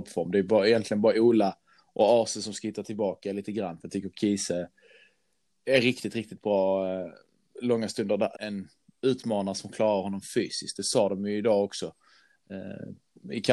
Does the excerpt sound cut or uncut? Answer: cut